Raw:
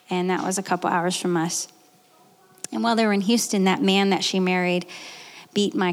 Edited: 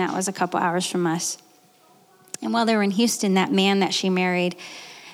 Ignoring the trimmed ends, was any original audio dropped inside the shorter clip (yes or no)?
no